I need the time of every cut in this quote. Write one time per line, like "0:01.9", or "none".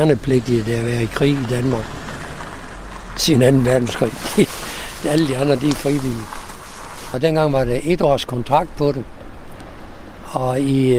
0:07.1